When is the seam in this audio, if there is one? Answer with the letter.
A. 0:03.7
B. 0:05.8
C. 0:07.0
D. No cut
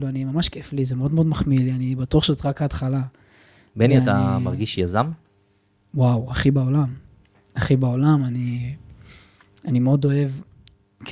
D